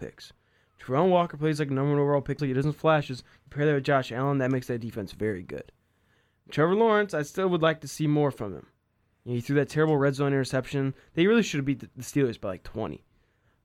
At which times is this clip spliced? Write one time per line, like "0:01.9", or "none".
0:02.4